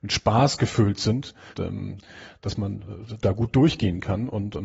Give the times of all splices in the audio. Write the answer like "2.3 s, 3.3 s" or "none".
1.5 s